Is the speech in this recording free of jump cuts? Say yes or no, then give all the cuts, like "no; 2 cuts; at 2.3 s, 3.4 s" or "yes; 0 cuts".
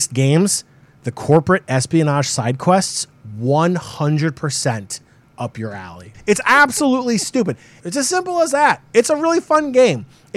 no; 2 cuts; at 6.1 s, 7.8 s